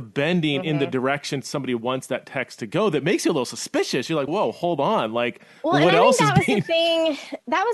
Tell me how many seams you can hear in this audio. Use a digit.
1